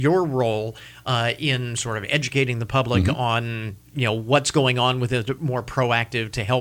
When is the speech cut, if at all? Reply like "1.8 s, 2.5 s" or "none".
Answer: 3.9 s, 5.4 s